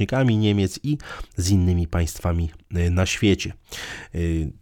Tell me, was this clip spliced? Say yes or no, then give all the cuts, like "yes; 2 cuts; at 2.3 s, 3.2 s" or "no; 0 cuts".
no; 0 cuts